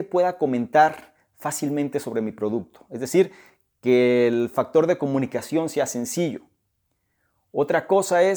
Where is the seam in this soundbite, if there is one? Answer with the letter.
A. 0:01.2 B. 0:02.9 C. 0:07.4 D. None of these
D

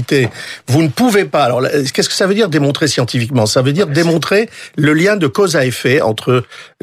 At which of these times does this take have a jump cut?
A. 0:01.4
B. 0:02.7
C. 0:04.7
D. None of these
D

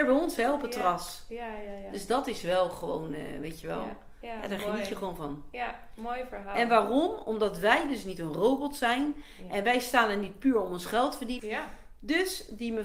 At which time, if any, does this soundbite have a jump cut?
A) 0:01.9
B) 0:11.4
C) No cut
B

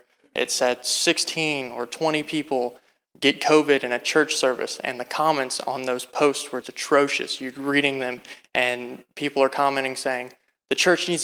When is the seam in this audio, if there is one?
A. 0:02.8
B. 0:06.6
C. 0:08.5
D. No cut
B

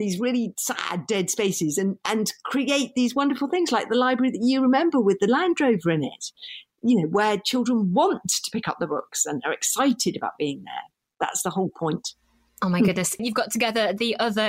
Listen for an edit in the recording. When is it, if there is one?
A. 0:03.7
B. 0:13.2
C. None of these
B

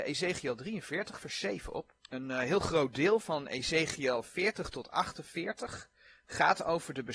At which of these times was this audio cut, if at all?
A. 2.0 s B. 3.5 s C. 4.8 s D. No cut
A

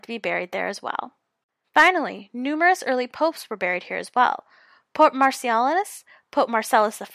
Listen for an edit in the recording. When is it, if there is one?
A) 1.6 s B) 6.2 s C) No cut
A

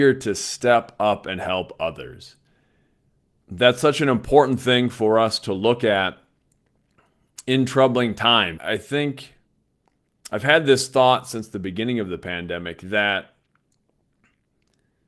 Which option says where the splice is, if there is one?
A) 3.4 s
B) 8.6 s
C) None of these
B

